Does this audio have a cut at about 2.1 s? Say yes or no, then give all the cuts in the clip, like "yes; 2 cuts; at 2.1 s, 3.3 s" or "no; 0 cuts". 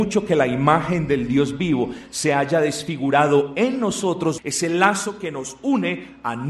no; 1 cut; at 4.4 s